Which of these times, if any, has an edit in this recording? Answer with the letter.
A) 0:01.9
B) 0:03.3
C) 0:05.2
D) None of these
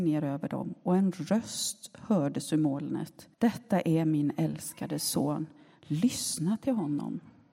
B